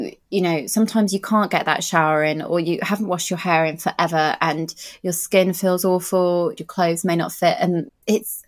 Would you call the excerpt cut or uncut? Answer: cut